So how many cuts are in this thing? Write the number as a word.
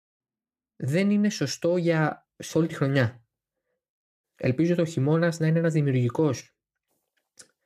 two